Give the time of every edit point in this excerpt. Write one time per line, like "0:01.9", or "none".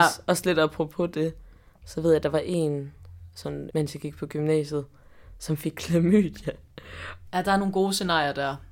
0:03.7
0:07.2